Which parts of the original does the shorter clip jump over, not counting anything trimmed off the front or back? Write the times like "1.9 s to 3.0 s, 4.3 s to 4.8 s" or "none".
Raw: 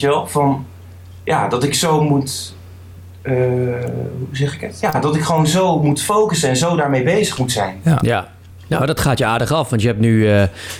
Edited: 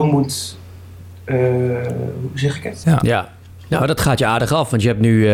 4.8 s to 7.8 s